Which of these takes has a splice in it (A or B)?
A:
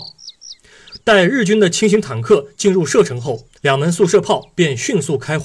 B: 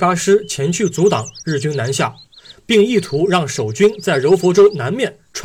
A